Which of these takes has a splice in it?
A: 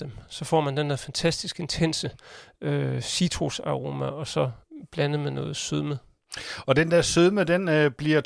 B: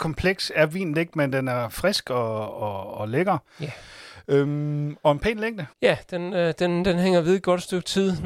B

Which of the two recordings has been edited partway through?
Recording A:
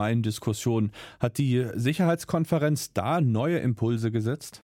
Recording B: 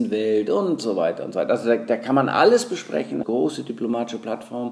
B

